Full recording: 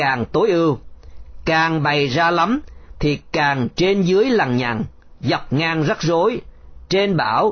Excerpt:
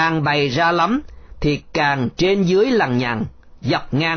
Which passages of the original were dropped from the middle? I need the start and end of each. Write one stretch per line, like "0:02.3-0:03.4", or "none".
none